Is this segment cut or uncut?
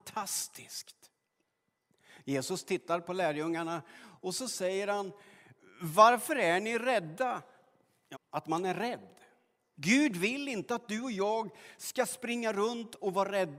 cut